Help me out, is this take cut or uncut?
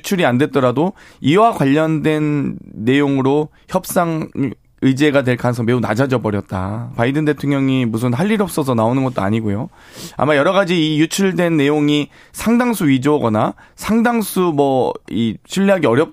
cut